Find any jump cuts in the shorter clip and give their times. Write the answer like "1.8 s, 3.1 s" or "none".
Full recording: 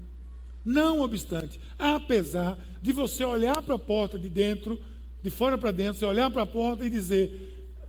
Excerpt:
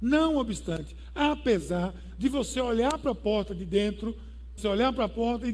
4.6 s

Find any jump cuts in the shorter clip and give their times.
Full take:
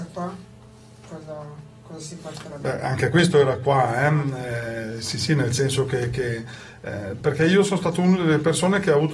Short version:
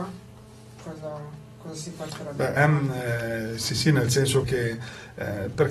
2.6 s, 4.4 s

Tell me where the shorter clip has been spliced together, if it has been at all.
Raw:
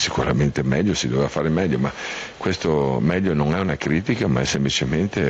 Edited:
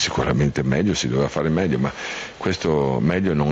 none

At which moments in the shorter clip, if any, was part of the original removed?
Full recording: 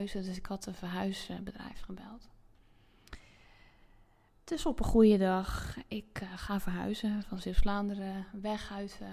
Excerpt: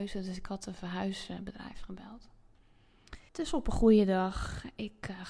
3.3 s

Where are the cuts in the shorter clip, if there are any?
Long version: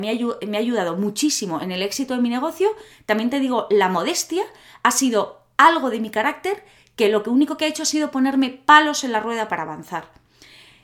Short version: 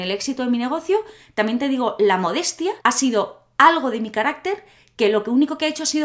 2.8 s

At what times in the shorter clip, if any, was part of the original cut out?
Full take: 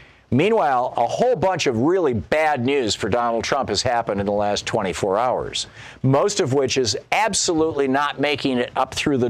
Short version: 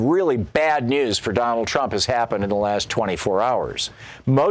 none

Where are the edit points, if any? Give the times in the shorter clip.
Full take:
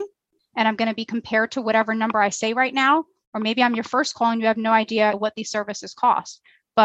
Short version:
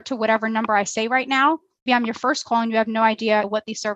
1.9 s

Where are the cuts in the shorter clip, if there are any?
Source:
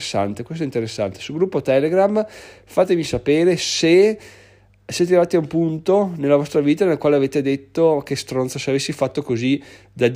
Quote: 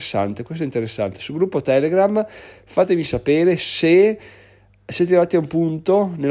none

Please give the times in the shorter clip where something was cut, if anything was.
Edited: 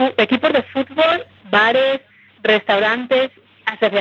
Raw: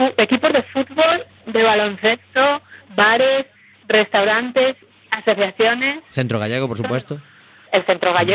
1.4 s

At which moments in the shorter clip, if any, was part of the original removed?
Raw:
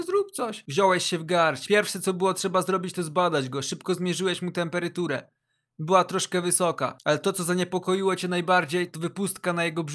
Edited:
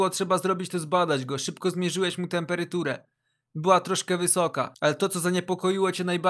none

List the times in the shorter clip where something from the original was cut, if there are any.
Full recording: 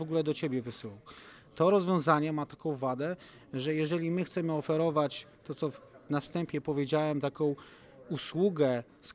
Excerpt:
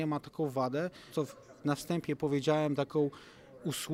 1.1 s

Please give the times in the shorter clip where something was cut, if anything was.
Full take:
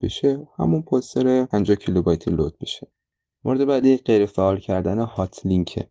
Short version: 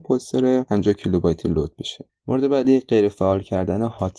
2.2 s

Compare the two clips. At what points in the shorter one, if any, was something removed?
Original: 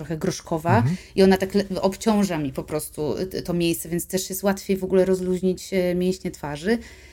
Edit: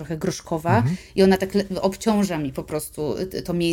none

